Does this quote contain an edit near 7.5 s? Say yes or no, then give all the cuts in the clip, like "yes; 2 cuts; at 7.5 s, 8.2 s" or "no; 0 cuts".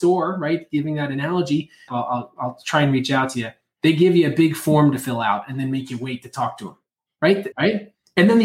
yes; 2 cuts; at 1.9 s, 7.5 s